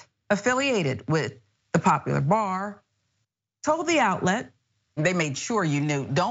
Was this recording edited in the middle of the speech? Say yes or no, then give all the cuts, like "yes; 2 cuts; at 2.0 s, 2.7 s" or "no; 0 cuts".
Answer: yes; 1 cut; at 5.0 s